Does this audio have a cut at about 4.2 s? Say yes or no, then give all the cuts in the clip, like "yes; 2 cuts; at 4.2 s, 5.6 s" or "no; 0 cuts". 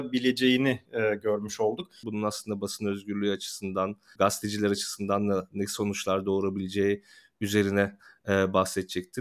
yes; 2 cuts; at 2.0 s, 4.2 s